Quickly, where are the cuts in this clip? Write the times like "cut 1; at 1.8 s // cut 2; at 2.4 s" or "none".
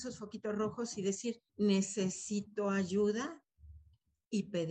cut 1; at 1.5 s